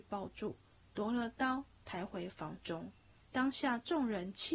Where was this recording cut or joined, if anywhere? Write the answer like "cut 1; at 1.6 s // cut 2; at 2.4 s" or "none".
cut 1; at 3.2 s